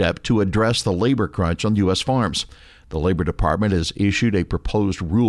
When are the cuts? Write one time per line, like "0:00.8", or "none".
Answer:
none